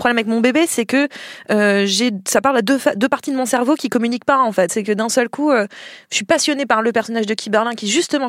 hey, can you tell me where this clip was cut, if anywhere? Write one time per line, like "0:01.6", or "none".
none